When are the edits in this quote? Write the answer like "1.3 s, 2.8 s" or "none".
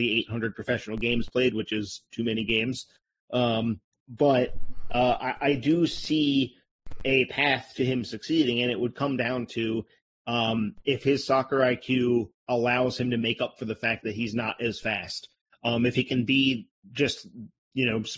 none